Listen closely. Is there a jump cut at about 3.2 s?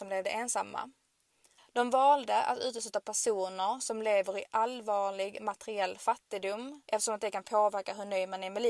no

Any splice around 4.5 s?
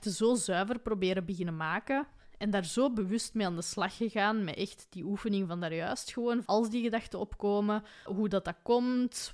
no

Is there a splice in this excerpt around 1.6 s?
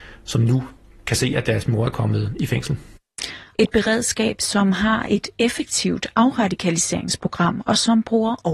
no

